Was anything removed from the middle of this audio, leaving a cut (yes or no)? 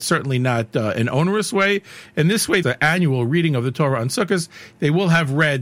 yes